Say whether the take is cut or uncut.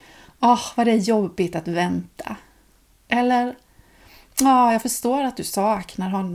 uncut